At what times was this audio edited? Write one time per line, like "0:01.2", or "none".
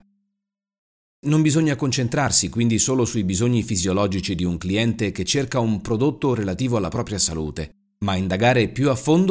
none